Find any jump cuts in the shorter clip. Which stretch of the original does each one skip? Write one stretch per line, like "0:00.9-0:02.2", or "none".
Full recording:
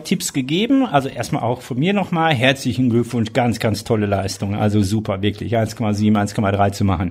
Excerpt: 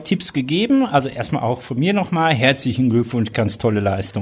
0:03.3-0:03.6